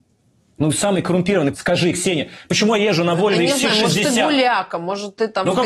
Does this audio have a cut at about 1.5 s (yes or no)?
yes